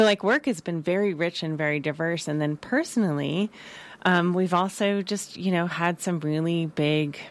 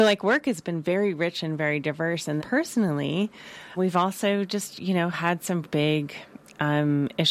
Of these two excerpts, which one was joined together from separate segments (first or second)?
second